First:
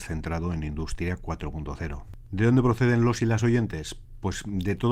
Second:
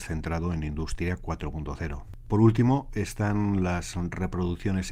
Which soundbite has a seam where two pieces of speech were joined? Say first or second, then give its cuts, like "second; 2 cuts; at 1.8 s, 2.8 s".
second; 1 cut; at 2.3 s